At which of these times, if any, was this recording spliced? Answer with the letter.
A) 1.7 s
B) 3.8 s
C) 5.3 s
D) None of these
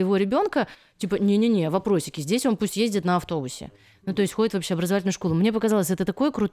D